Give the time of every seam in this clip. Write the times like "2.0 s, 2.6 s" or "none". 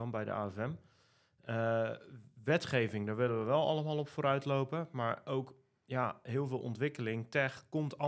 none